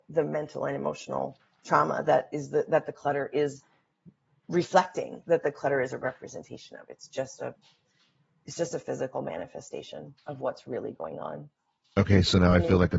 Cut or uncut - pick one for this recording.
uncut